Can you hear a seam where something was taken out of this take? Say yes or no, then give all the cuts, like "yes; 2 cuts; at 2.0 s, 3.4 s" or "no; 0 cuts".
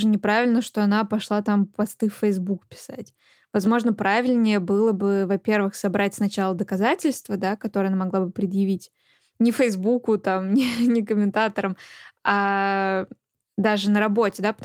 no; 0 cuts